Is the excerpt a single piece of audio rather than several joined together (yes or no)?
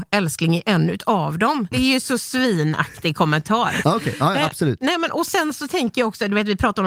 no